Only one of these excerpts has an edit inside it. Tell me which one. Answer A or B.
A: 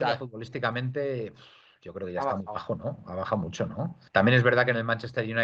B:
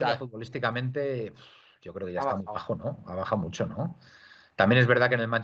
A